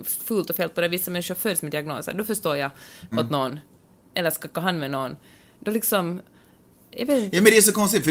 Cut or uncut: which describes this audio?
cut